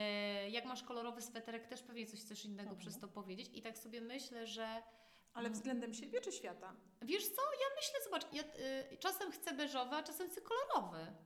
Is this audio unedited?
no; 1 cut; at 8.3 s

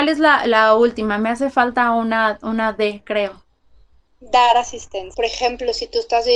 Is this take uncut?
yes; 0 cuts

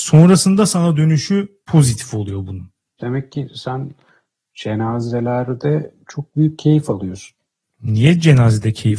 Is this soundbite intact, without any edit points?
no; 1 cut; at 3.0 s

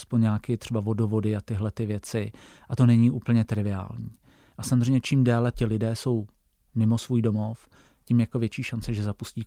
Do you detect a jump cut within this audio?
yes; 1 cut; at 4.5 s

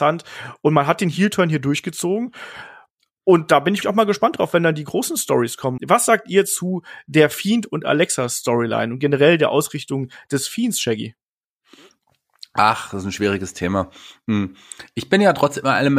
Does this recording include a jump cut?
yes; 2 cuts; at 3.8 s, 5.8 s

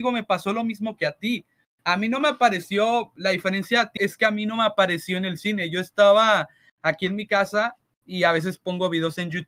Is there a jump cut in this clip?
yes; 1 cut; at 4.0 s

